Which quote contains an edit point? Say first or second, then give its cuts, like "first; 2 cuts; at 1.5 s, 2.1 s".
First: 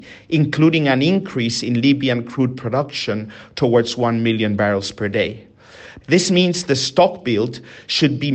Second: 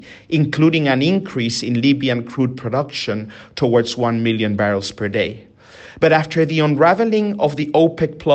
first; 1 cut; at 6.0 s